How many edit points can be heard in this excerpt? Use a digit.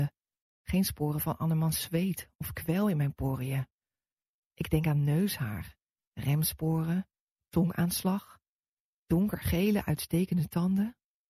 0